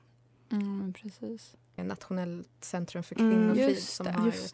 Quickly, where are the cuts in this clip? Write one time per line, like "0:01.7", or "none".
0:01.8